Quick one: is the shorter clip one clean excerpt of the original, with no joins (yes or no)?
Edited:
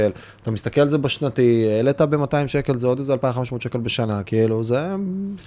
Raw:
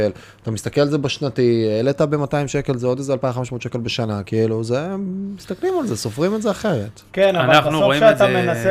yes